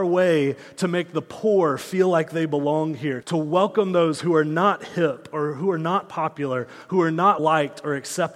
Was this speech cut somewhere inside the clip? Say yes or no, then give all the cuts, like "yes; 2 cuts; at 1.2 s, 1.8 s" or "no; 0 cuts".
yes; 2 cuts; at 3.2 s, 7.4 s